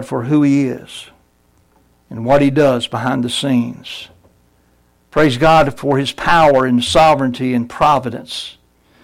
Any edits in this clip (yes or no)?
no